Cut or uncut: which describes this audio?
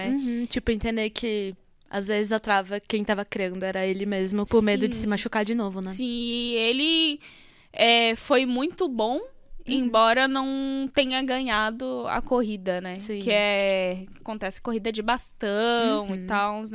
uncut